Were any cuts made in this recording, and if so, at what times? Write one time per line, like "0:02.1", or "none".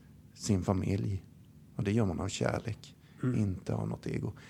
none